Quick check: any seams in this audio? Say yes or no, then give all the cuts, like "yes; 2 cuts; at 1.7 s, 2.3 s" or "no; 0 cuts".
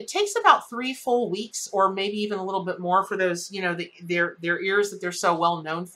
no; 0 cuts